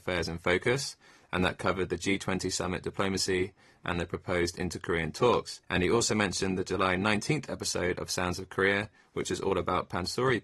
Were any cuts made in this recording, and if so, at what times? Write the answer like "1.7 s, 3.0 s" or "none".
5.6 s